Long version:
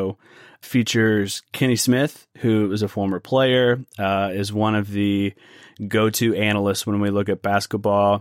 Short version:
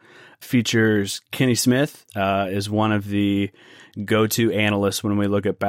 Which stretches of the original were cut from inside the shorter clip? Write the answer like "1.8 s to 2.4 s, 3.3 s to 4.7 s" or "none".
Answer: 2.3 s to 3.9 s